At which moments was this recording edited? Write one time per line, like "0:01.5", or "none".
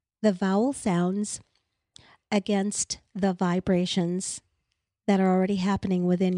0:03.1